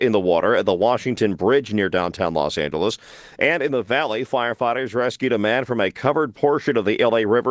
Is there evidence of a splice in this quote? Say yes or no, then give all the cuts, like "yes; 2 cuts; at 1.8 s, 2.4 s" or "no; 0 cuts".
no; 0 cuts